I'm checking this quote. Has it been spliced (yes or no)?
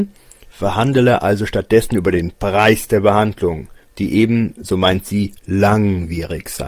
no